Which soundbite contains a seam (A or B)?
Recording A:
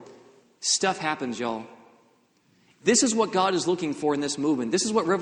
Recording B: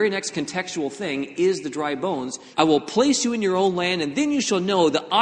B